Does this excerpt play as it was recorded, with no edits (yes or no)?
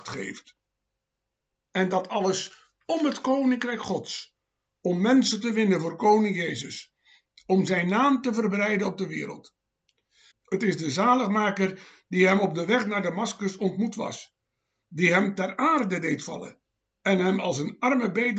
no